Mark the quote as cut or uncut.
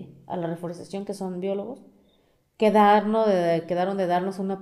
uncut